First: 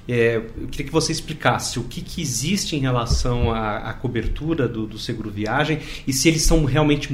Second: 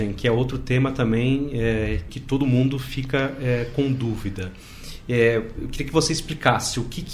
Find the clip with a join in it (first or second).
second